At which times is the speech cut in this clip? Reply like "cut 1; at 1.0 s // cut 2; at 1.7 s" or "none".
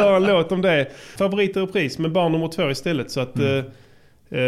cut 1; at 1.2 s